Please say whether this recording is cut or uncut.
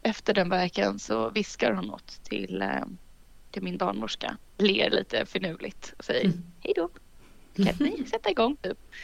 uncut